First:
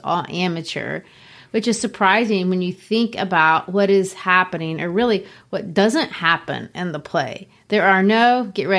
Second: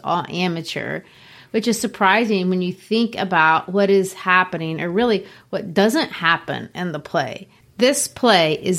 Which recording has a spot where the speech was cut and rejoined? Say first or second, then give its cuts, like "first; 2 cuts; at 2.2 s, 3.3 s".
second; 1 cut; at 7.6 s